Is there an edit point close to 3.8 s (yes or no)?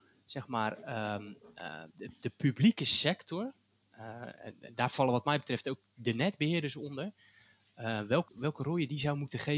no